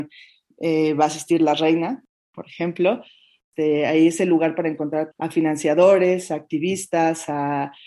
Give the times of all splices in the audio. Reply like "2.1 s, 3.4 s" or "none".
5.1 s